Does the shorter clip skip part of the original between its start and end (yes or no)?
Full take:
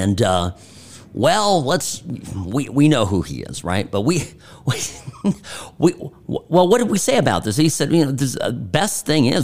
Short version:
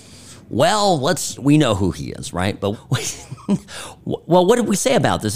yes